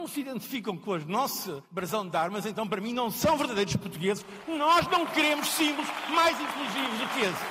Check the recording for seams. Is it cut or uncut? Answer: uncut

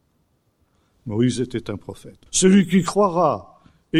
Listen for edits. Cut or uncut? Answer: cut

